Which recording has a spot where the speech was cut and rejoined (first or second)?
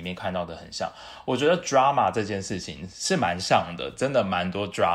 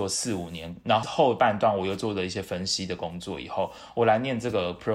second